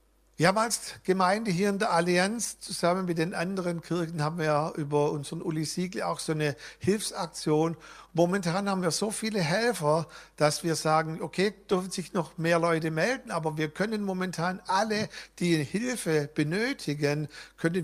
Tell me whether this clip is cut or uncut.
uncut